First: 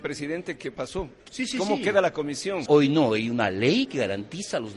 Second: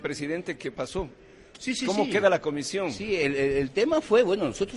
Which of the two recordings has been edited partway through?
first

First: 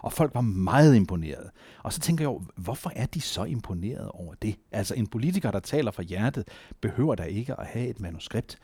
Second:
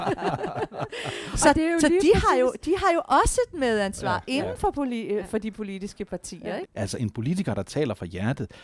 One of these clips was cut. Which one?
second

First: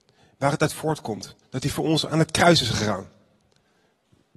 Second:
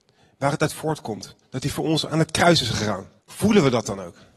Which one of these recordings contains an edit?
second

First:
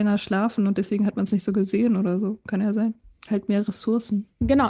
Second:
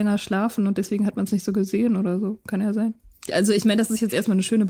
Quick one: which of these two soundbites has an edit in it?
second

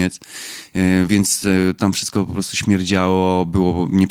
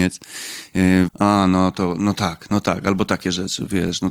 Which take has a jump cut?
second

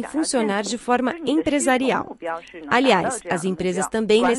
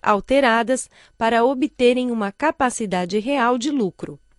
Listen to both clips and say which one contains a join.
first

